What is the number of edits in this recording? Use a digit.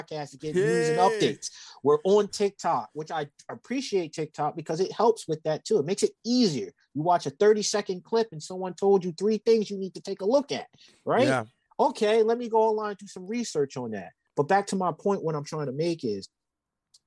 0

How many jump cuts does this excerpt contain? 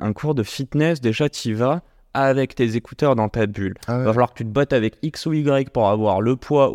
0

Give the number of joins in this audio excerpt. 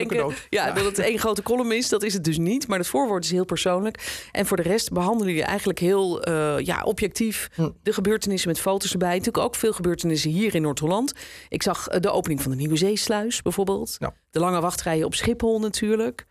0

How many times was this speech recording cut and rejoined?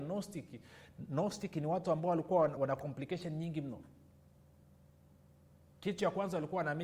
1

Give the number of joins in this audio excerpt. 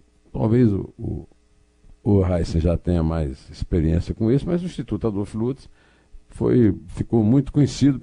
0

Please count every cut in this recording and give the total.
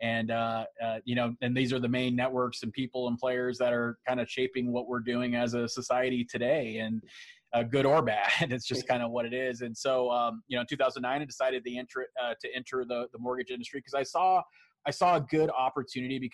0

